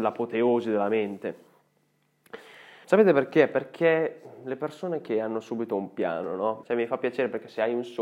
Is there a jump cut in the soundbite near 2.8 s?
yes; 2 cuts; at 2.8 s, 6.6 s

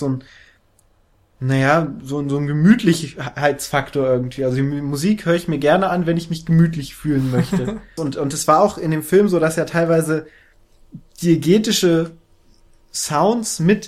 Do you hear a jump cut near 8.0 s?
yes; 1 cut; at 8.0 s

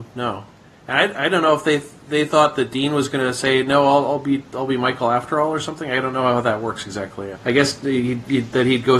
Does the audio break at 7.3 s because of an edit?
yes; 1 cut; at 7.3 s

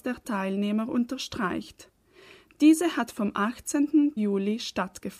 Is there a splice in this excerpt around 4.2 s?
yes; 1 cut; at 4.2 s

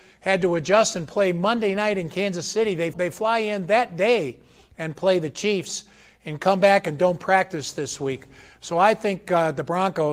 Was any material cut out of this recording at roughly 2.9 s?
yes; 1 cut; at 2.9 s

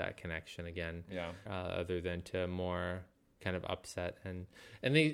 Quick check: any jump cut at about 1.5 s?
yes; 1 cut; at 1.5 s

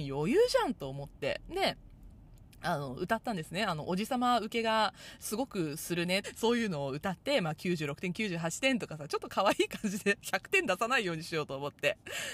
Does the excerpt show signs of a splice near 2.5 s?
no; 1 cut; at 6.2 s

